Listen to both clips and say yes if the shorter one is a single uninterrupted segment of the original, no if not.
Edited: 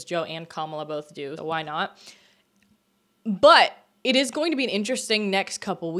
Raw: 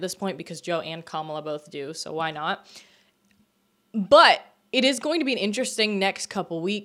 no